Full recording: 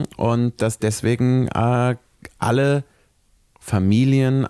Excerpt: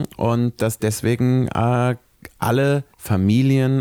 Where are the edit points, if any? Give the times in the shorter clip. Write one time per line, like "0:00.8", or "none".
0:02.9

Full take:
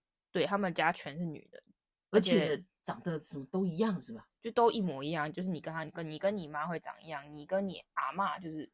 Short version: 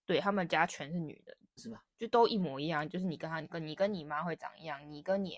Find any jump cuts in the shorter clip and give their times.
0:01.6

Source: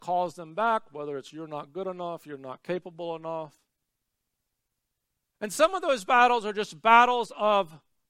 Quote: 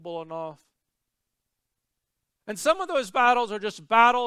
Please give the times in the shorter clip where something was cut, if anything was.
none

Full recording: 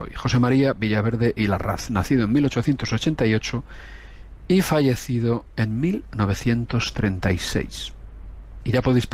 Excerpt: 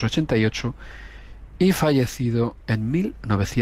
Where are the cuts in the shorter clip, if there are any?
none

